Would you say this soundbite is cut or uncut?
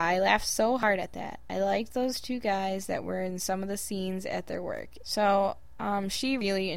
cut